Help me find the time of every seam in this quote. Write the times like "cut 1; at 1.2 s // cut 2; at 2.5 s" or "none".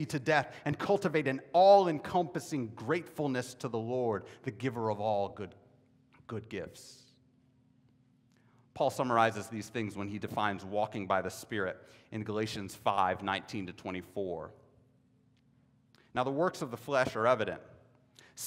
none